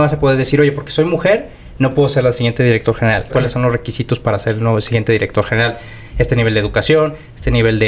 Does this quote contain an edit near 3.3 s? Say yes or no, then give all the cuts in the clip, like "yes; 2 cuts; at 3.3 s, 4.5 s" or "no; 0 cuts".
yes; 1 cut; at 3.3 s